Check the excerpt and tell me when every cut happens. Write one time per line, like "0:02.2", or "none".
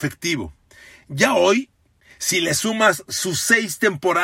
none